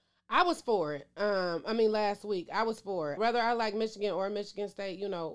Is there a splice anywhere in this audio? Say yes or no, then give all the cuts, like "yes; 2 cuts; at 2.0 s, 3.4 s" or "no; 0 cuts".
yes; 1 cut; at 3.2 s